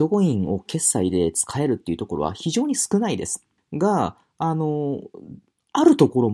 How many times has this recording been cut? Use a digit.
1